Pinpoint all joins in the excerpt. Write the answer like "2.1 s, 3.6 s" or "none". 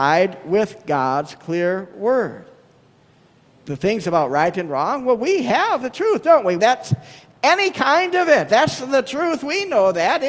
6.6 s